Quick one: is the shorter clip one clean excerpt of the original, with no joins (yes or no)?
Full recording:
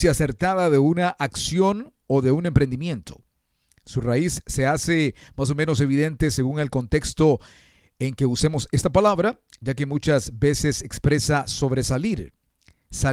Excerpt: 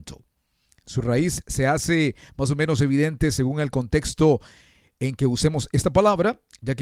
yes